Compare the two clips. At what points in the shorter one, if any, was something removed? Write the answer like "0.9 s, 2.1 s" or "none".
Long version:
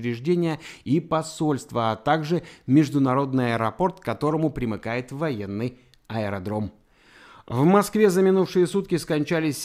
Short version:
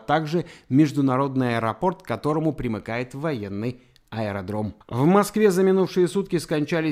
4.8 s